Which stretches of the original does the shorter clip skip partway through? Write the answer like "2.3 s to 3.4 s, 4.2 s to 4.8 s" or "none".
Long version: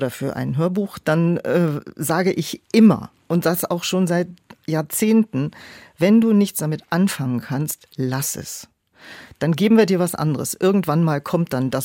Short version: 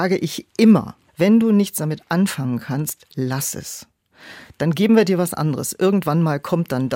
3.2 s to 5.9 s